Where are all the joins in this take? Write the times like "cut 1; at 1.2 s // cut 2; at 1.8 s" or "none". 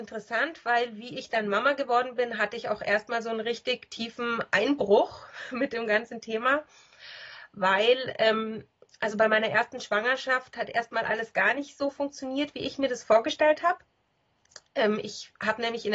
none